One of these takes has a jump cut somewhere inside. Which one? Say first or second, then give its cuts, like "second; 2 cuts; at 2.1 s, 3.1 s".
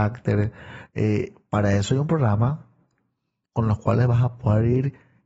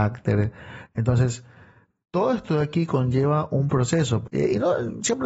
second; 2 cuts; at 0.9 s, 4.2 s